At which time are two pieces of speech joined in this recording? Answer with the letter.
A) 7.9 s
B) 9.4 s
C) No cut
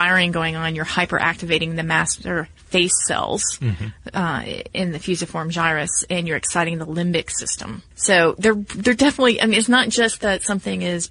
A